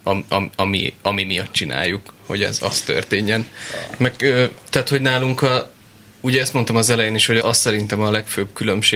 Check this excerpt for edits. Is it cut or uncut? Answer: cut